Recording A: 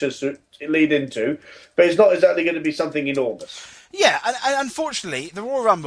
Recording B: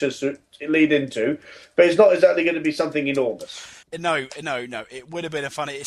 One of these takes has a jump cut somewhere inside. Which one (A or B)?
B